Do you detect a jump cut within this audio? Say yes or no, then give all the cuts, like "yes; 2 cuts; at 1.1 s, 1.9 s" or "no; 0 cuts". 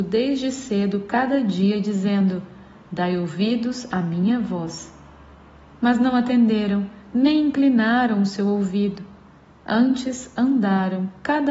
no; 0 cuts